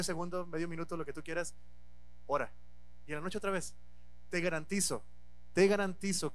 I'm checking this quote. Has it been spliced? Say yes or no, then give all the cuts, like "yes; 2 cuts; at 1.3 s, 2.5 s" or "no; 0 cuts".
no; 0 cuts